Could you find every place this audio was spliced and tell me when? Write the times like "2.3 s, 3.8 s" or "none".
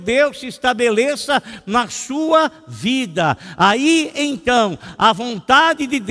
none

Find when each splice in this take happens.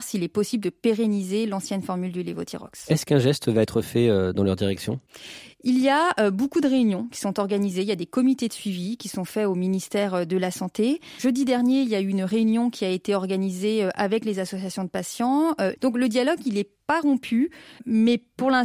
15.8 s

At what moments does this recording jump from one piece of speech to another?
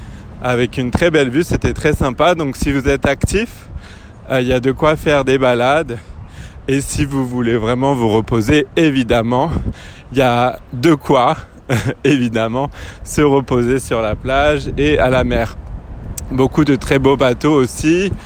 none

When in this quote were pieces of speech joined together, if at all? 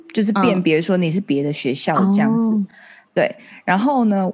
none

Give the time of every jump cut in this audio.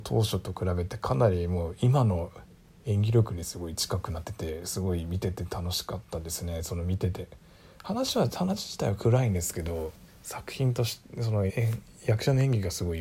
4.2 s, 11.5 s

